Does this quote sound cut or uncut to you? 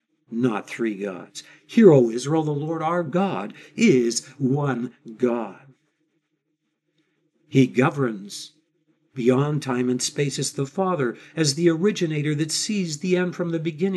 uncut